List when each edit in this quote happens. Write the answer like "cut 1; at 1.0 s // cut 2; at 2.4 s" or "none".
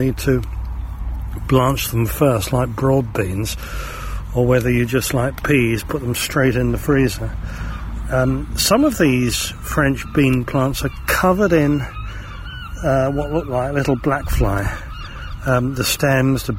none